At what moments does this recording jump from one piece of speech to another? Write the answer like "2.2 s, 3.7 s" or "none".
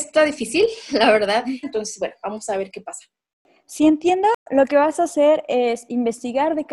1.6 s